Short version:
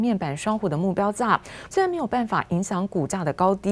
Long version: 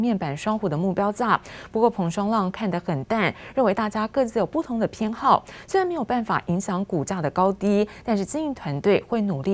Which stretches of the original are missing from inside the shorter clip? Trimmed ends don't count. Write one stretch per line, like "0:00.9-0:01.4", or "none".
0:01.7-0:05.7